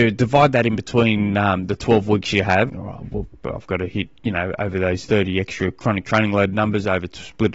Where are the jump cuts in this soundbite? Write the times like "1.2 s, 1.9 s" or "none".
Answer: 2.7 s